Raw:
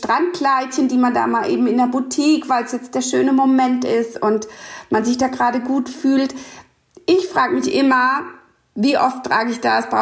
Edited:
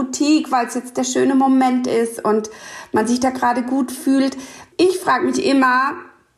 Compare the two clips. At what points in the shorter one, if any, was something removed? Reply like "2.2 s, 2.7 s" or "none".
4.7 s